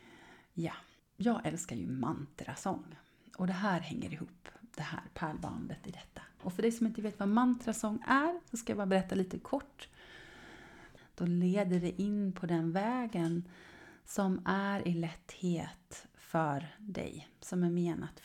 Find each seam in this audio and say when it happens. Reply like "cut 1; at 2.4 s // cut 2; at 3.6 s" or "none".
cut 1; at 1.0 s // cut 2; at 11.0 s